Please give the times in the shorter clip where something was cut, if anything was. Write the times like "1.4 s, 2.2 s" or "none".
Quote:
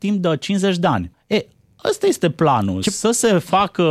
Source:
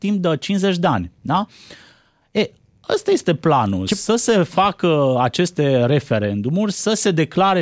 1.1 s

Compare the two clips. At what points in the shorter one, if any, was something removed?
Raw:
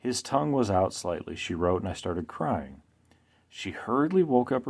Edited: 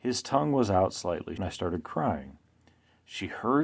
1.4 s

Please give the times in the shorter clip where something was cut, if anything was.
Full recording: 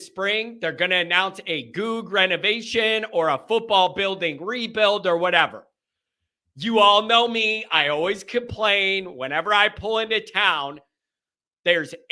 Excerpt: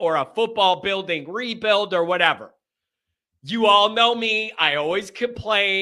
none

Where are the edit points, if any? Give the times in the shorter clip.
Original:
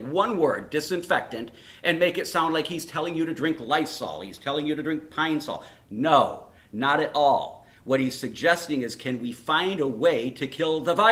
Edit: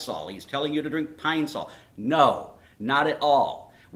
none

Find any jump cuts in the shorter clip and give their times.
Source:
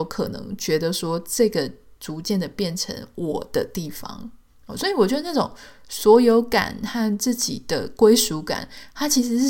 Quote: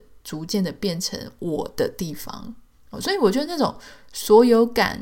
none

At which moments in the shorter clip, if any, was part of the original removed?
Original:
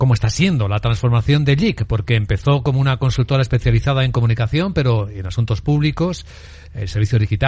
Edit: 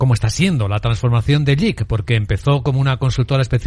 none

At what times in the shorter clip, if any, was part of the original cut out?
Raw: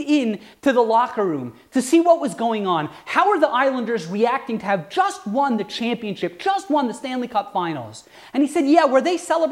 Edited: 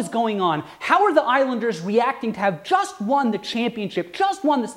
none

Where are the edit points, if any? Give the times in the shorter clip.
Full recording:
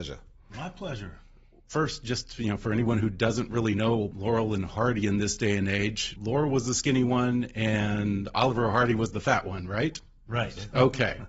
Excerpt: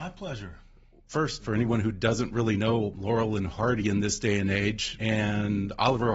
1.4 s, 5.0 s

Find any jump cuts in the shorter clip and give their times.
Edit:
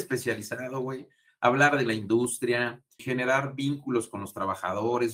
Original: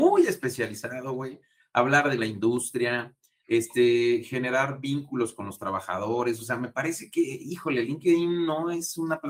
3.0 s

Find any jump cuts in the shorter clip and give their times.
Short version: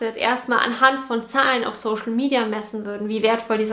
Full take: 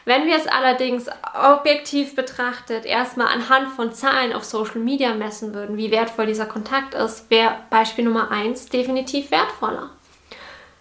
none

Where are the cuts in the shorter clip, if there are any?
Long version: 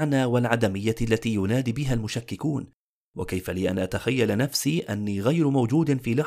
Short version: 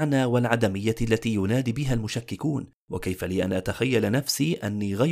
2.8 s

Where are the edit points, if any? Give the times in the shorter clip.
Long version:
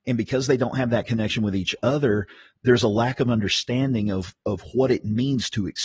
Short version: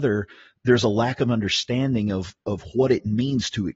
none

